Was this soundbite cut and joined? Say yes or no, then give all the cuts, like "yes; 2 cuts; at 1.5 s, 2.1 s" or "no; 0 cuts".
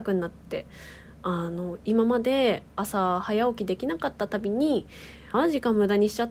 yes; 1 cut; at 5.3 s